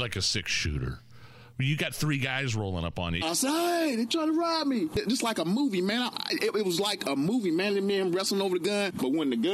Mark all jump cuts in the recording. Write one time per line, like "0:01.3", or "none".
0:03.2

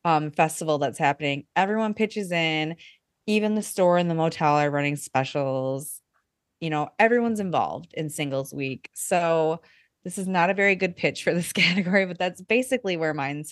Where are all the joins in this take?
none

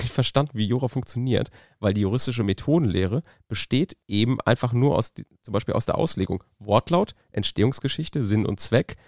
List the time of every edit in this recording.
0:04.0

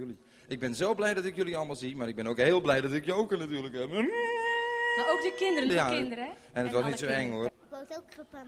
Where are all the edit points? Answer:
0:05.7
0:07.5

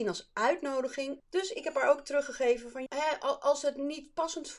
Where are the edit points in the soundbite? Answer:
0:01.2
0:02.9

